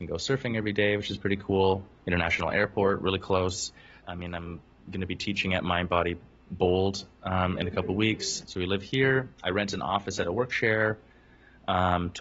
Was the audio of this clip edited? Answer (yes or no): yes